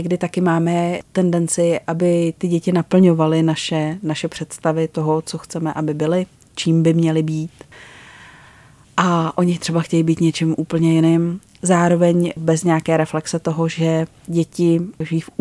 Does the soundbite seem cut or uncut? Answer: uncut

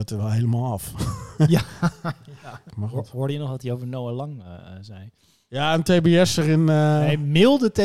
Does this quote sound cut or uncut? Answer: cut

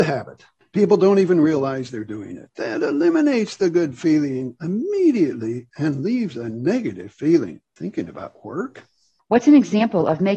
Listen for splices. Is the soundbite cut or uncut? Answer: cut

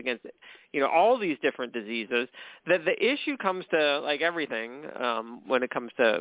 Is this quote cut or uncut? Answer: uncut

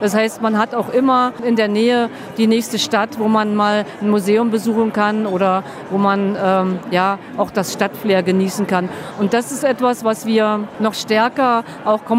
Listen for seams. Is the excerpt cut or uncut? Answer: uncut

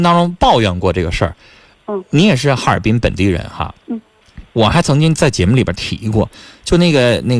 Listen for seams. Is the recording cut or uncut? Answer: cut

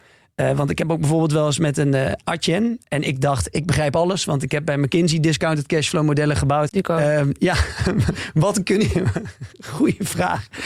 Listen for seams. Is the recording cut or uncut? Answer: cut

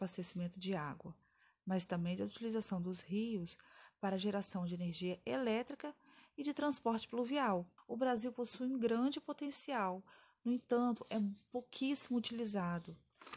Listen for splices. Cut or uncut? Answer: cut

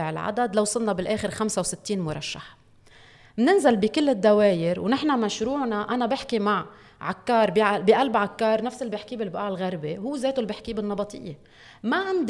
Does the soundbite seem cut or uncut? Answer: uncut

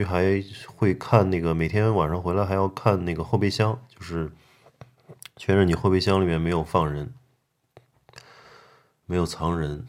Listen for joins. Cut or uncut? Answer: uncut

